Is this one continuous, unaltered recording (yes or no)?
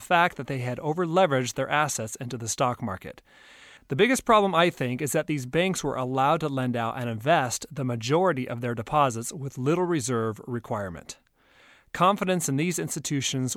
no